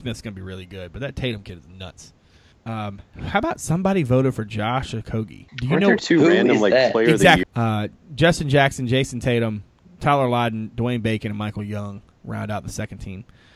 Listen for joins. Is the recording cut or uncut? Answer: cut